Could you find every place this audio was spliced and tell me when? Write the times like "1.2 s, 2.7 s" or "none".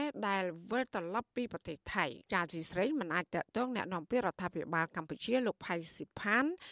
2.2 s